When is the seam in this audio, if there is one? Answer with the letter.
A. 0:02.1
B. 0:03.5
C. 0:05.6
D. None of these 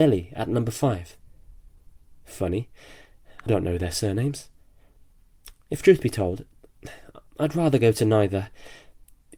B